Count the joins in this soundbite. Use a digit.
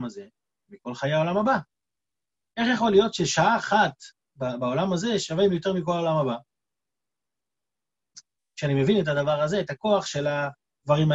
1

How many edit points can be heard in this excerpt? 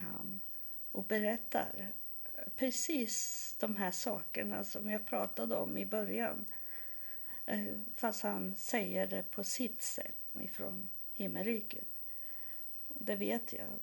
2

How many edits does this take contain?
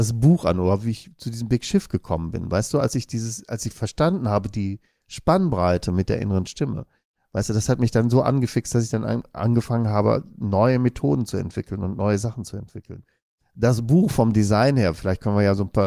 0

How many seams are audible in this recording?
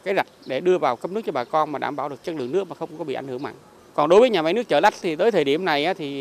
1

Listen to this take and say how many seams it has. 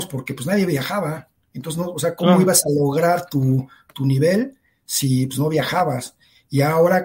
0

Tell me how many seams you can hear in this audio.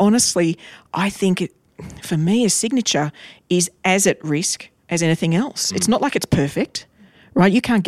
0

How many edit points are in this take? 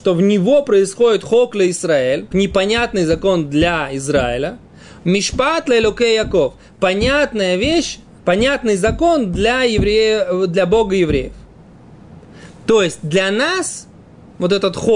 1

